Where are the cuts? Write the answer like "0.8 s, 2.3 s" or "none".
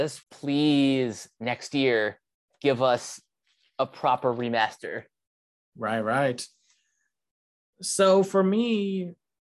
none

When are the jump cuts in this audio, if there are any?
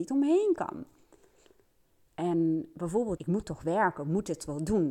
3.2 s

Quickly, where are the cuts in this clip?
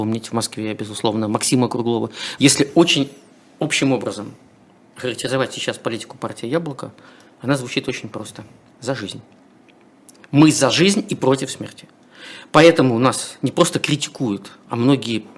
2.4 s

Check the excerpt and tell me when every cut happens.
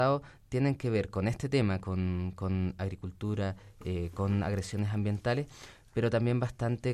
none

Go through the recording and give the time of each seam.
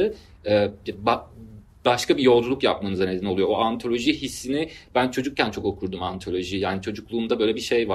none

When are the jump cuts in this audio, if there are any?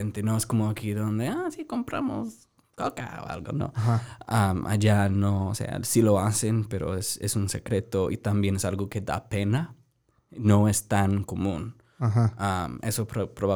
none

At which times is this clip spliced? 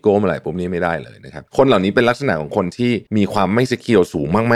1.5 s, 3.1 s

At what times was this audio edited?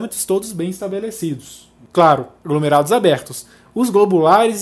none

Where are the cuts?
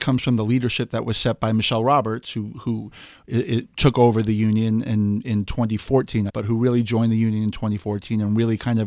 6.3 s

